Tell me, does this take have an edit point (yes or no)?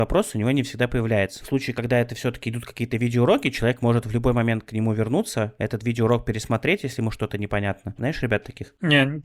yes